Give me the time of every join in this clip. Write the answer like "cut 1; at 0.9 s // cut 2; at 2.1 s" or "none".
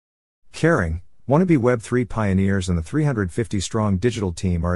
cut 1; at 1.2 s